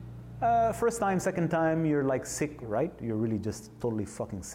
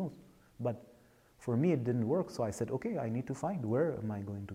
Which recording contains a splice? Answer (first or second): first